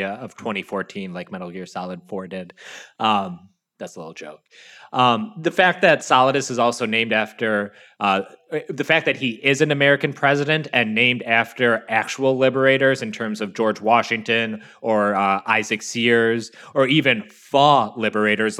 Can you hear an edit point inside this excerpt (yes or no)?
no